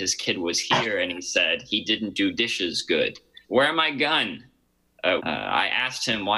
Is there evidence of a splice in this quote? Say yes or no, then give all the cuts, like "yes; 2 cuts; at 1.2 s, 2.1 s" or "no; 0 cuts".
yes; 2 cuts; at 3.4 s, 5.2 s